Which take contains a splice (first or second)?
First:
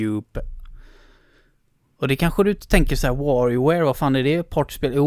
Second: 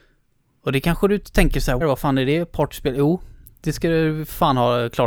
second